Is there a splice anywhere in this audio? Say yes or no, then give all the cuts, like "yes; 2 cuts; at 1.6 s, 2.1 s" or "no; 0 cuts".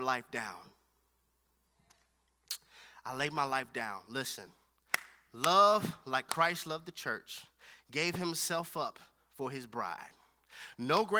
no; 0 cuts